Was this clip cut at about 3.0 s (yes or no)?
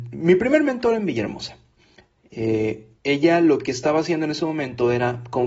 yes